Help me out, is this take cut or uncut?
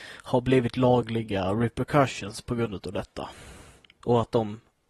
cut